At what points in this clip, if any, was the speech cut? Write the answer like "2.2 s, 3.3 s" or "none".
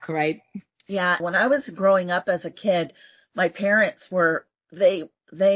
1.2 s